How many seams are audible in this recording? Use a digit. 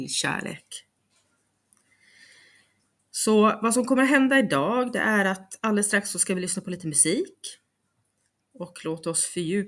1